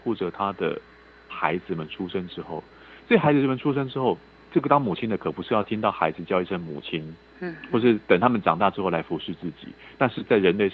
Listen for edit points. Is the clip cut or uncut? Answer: uncut